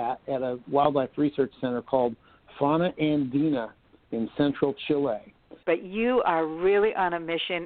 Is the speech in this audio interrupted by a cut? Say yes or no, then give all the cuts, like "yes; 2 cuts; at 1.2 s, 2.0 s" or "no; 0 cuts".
yes; 1 cut; at 5.6 s